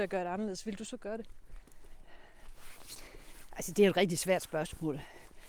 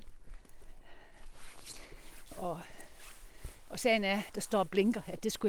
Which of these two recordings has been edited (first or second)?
second